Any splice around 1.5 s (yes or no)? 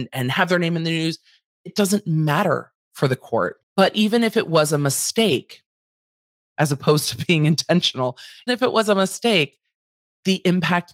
no